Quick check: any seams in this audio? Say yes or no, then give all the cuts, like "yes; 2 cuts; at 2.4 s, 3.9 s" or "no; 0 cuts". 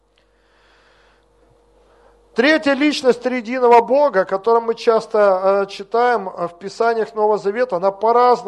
no; 0 cuts